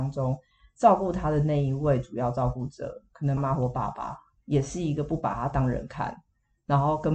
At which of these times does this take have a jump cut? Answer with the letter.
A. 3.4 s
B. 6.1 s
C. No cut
A